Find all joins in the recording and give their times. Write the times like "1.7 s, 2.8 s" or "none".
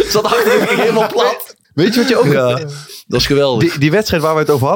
1.6 s